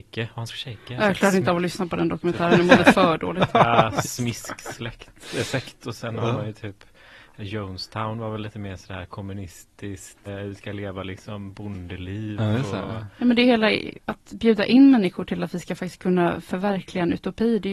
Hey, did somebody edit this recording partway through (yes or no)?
yes